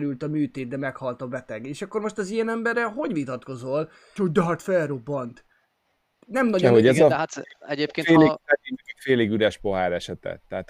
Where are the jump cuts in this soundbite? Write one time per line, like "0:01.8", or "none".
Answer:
0:04.2